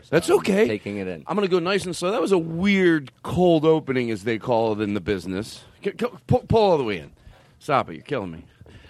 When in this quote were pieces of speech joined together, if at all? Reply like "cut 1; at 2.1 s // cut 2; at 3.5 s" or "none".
none